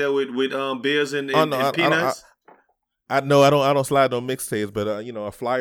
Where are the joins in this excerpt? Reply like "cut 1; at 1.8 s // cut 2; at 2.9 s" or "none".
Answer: none